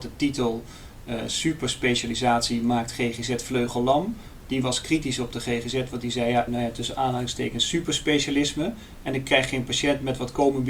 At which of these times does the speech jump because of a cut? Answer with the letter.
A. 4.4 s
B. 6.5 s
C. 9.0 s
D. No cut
B